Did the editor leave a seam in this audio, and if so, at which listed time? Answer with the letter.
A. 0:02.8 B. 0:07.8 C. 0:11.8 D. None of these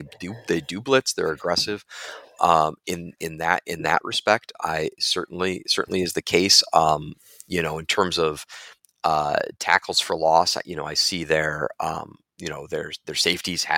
D